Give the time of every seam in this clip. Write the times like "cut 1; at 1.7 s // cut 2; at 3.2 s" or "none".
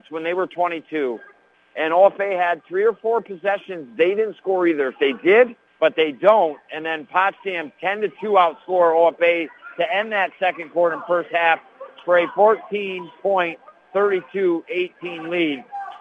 cut 1; at 5.7 s